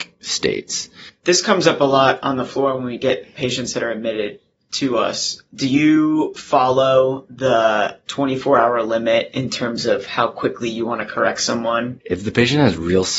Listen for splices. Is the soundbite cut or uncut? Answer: cut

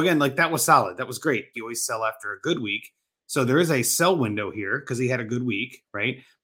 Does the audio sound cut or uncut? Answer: cut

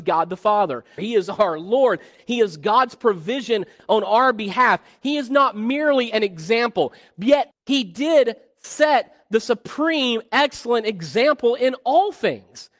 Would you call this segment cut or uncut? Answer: cut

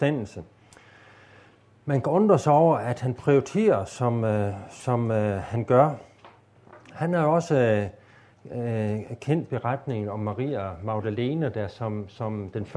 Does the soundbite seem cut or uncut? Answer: uncut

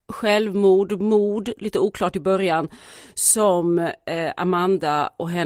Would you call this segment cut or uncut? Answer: uncut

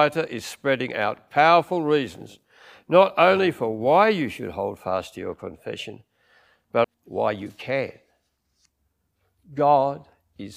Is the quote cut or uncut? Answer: cut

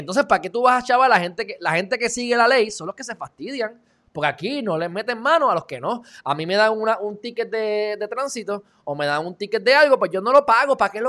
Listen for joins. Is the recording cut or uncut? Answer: uncut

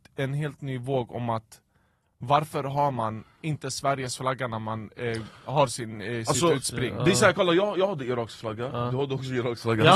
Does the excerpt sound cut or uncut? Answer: uncut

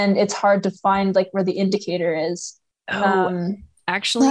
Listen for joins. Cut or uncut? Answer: uncut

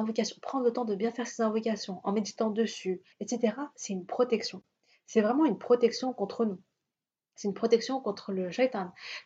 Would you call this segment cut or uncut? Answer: cut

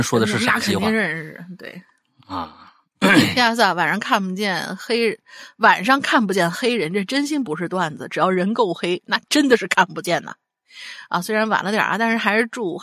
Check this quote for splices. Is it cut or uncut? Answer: uncut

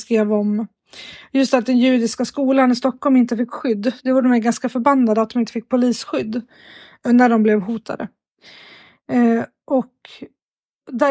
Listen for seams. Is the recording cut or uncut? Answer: uncut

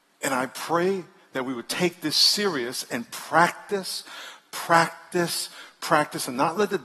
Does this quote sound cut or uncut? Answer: uncut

